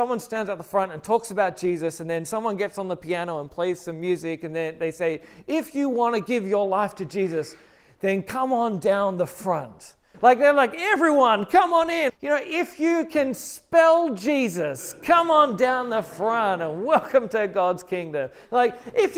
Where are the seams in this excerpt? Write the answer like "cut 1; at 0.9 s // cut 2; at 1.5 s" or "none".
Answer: cut 1; at 10.1 s // cut 2; at 12.1 s

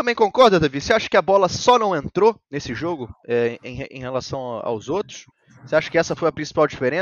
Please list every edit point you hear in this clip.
cut 1; at 2.4 s

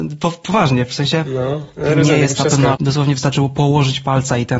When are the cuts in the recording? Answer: cut 1; at 2.7 s

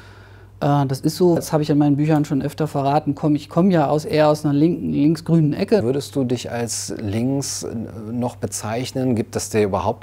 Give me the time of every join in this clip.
cut 1; at 1.4 s // cut 2; at 5.8 s

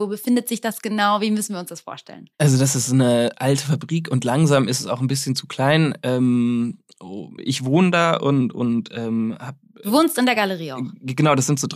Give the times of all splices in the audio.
cut 1; at 2.3 s // cut 2; at 7.4 s

